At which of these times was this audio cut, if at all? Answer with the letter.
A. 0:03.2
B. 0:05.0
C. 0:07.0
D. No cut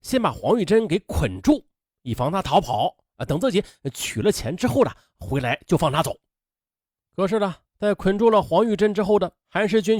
C